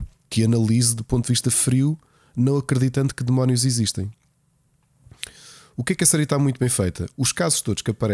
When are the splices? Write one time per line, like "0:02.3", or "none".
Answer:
none